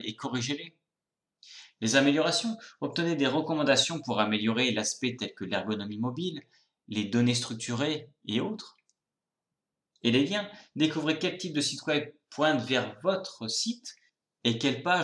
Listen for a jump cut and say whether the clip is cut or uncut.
uncut